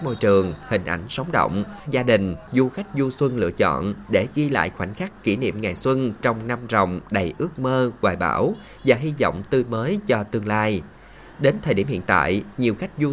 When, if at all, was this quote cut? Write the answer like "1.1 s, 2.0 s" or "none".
1.9 s